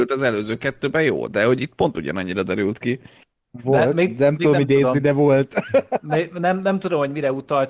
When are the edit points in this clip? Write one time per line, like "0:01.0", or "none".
0:03.6